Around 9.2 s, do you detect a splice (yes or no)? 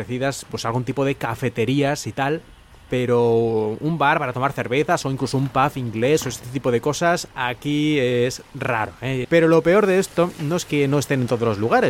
yes